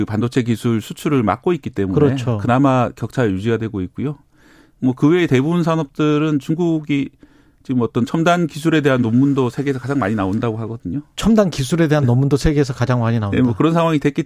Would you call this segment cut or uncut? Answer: uncut